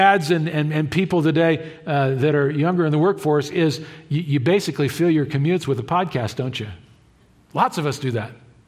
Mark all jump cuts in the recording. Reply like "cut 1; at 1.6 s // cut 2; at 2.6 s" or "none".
none